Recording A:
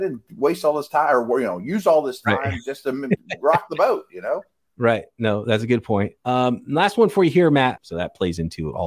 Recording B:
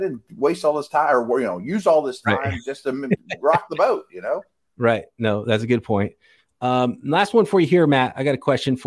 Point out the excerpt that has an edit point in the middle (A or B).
A